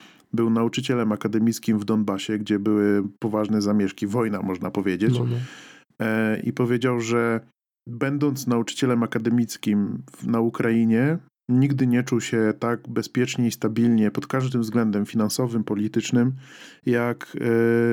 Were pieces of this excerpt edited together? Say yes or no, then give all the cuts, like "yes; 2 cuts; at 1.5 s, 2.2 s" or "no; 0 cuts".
no; 0 cuts